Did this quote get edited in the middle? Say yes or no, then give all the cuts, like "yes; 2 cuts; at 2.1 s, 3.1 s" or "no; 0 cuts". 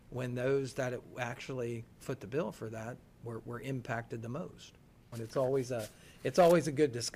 yes; 1 cut; at 5.1 s